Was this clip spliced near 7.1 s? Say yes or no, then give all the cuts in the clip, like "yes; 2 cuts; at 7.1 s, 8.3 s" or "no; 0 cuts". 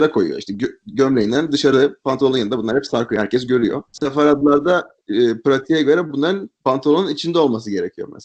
no; 1 cut; at 3.9 s